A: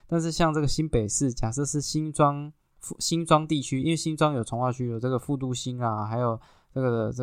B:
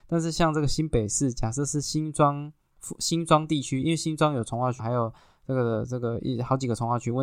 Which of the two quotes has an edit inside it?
B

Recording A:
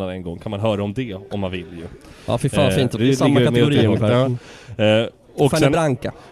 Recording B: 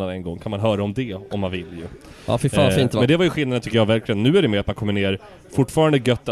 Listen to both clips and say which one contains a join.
A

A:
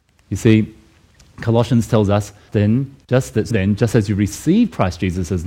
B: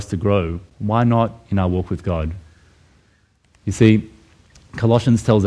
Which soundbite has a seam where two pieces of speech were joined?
A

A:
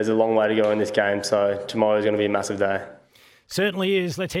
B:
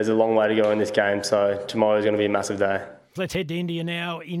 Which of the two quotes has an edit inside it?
B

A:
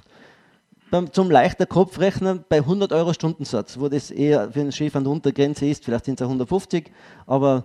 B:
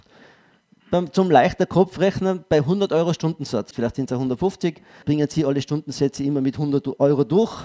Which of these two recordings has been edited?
B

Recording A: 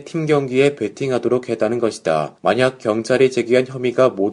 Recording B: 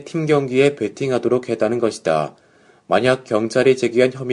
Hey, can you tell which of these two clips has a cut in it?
A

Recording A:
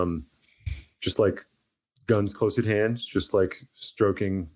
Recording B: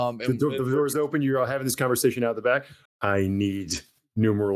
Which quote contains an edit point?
B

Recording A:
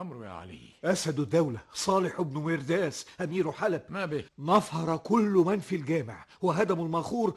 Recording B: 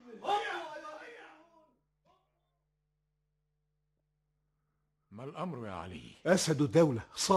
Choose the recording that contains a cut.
A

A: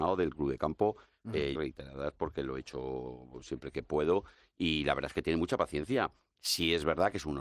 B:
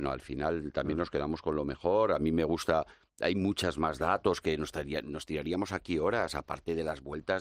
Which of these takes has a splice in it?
A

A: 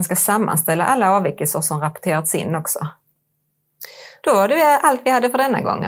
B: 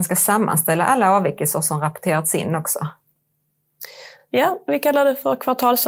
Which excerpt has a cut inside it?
A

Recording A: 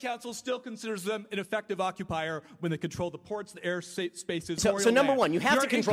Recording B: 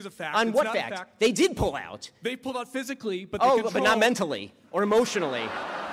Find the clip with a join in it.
A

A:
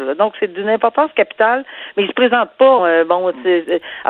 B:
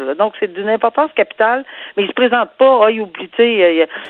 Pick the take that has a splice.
A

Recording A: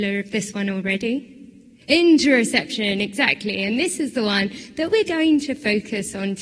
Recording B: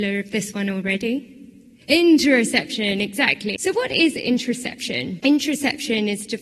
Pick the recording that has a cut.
B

